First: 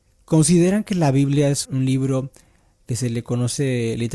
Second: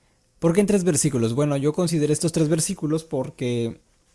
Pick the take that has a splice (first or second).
first